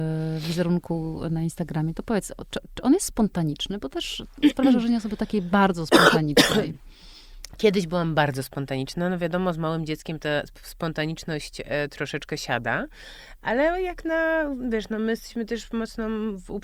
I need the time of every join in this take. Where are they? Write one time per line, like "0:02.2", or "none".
none